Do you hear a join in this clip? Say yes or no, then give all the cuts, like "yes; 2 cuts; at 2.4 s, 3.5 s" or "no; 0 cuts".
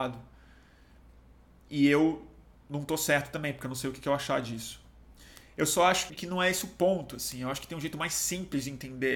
yes; 1 cut; at 6.1 s